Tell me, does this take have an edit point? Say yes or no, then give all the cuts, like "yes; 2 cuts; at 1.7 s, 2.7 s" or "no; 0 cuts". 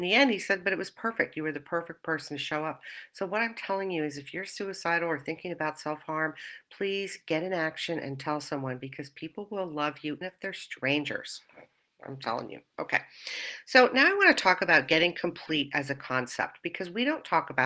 yes; 1 cut; at 10.2 s